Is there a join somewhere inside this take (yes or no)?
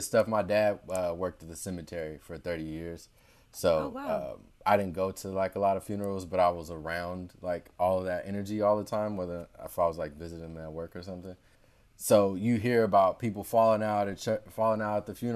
no